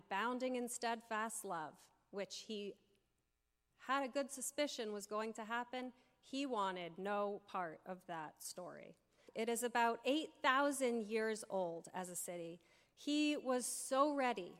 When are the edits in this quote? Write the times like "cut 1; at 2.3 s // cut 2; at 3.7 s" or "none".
cut 1; at 9.3 s // cut 2; at 12.9 s